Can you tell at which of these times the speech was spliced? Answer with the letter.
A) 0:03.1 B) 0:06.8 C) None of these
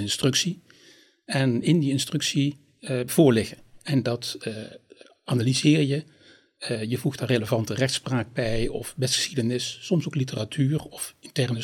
A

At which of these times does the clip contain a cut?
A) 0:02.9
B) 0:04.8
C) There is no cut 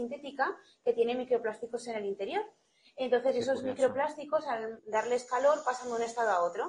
B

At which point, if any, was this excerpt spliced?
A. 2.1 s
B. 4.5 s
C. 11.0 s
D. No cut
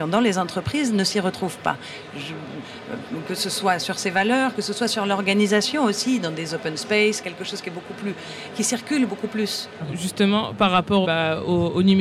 C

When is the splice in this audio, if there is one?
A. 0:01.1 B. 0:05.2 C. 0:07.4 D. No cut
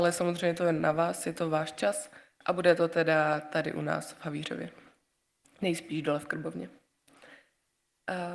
D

